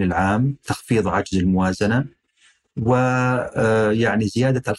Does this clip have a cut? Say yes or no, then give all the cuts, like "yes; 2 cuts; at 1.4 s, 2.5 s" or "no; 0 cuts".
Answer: no; 0 cuts